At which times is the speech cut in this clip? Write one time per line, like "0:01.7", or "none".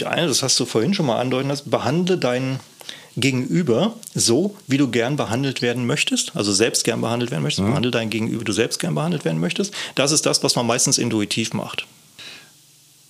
0:08.4

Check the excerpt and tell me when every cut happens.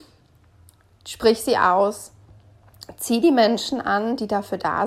none

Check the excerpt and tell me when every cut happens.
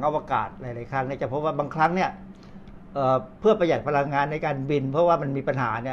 none

